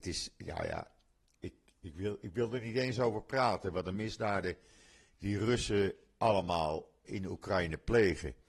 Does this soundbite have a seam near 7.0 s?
yes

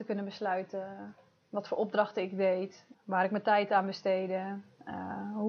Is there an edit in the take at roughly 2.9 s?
yes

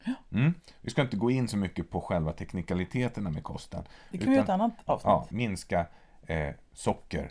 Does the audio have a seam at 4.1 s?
no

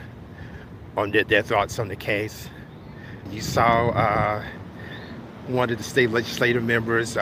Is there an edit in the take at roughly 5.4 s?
no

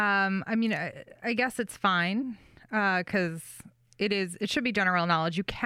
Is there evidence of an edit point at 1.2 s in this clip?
no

